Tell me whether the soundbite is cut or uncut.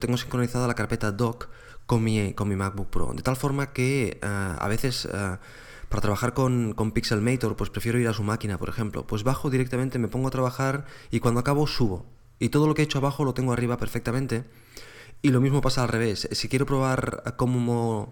uncut